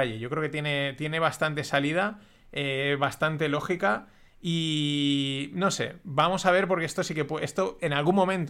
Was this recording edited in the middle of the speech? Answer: no; 0 cuts

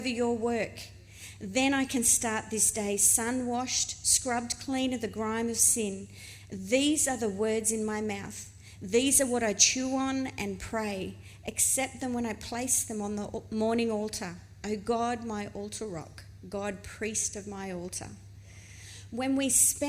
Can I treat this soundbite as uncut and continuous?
yes; 0 cuts

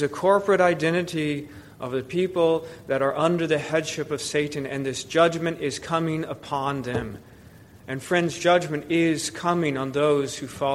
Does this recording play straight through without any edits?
yes; 0 cuts

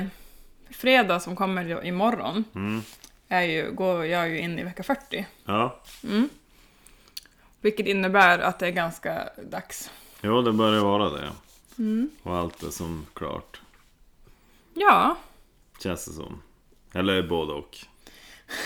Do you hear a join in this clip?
no; 0 cuts

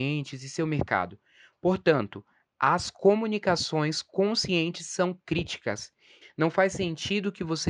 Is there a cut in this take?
yes; 1 cut; at 6.2 s

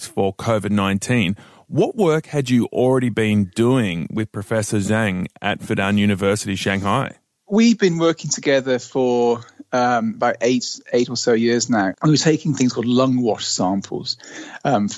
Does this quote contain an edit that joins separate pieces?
yes; 1 cut; at 11.9 s

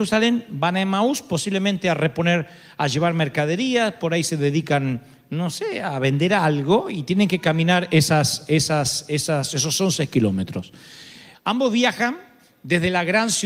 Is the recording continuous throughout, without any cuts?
no; 1 cut; at 11.3 s

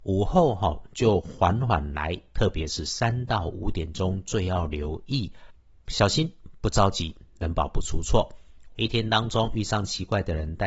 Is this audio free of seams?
no; 1 cut; at 8.7 s

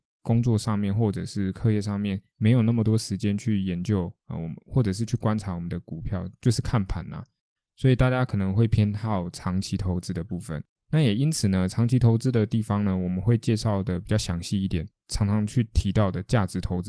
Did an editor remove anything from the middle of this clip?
yes; 1 cut; at 15.0 s

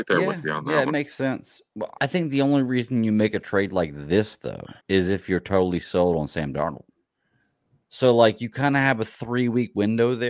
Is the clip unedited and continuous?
no; 3 cuts; at 2.0 s, 4.8 s, 7.8 s

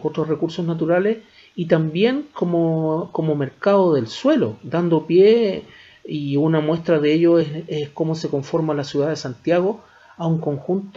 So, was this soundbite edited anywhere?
no; 0 cuts

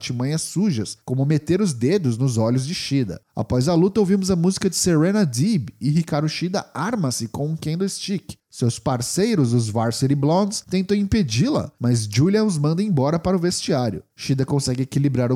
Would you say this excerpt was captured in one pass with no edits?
no; 2 cuts; at 3.2 s, 8.4 s

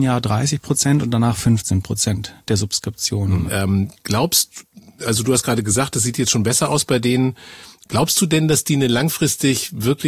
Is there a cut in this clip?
yes; 1 cut; at 3.5 s

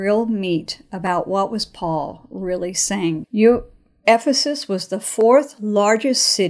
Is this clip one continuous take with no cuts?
no; 1 cut; at 3.2 s

